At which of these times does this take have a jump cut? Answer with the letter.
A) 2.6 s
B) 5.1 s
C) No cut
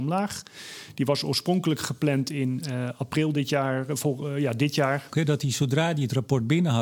B